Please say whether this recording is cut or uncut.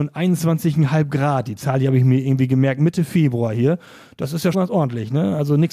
cut